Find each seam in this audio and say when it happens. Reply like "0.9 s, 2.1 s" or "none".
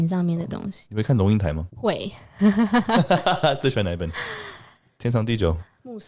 none